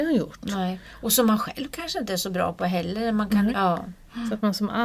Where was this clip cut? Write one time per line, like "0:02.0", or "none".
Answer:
0:03.5